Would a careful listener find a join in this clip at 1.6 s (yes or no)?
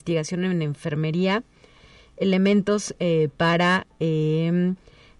no